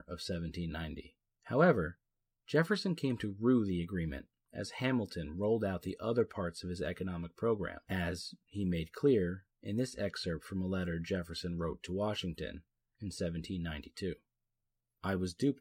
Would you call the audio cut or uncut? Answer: uncut